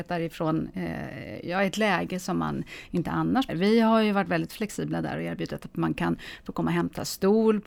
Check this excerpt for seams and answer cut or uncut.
cut